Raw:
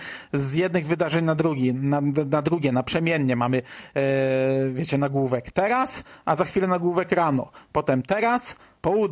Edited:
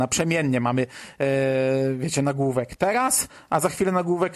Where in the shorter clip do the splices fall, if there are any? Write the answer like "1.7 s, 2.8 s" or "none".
none

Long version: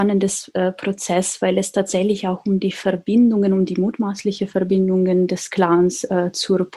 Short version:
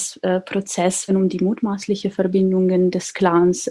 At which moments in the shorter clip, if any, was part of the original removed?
1.1 s

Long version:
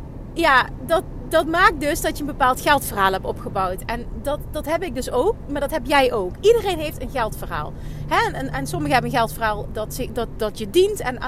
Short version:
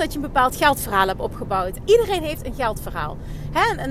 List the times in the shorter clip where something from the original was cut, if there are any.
1.8 s

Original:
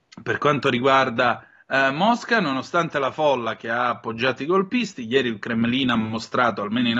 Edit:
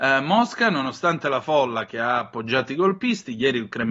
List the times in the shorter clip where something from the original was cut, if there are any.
none

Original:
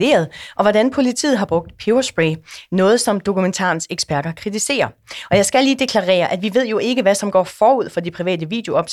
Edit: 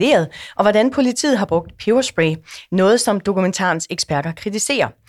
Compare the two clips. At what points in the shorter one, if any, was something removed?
none

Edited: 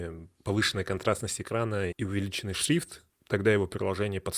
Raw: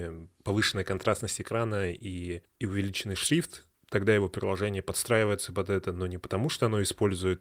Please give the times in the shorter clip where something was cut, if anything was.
1.9 s

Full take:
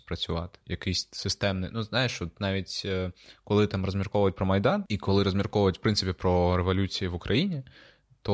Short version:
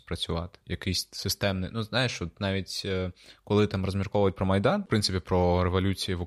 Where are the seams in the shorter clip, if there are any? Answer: 4.9 s

